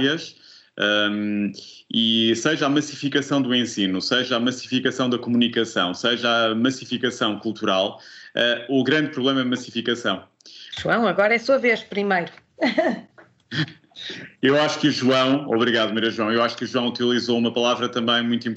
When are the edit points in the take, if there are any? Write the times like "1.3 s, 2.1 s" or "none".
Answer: 10.7 s, 13.1 s